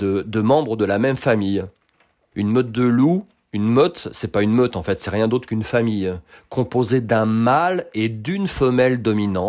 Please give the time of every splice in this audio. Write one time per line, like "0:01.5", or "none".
0:02.3